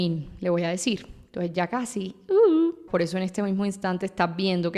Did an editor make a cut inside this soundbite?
yes; 1 cut; at 2.9 s

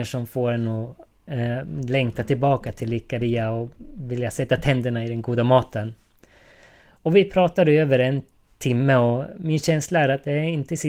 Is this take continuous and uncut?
yes; 0 cuts

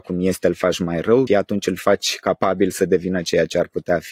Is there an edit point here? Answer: yes; 1 cut; at 1.3 s

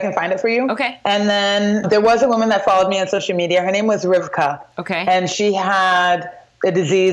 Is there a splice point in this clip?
yes; 1 cut; at 1.8 s

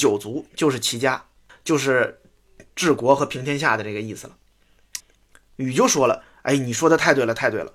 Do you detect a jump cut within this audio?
yes; 2 cuts; at 1.5 s, 5.0 s

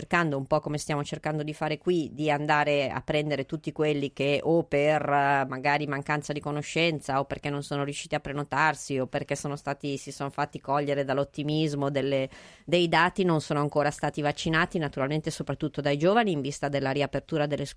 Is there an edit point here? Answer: no; 0 cuts

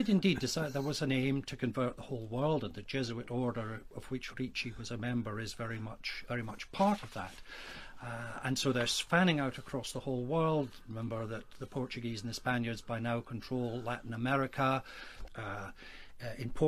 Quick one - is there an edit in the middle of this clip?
yes; 2 cuts; at 6.3 s, 15.3 s

